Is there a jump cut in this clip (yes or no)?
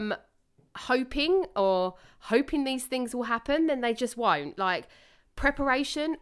no